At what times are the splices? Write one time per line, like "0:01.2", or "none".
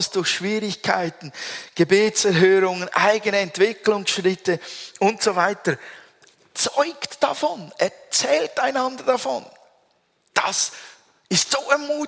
none